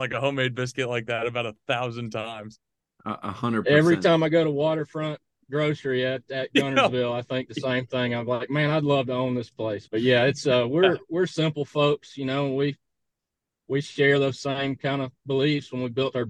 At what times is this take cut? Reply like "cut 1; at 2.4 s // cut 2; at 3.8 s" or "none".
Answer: cut 1; at 9.9 s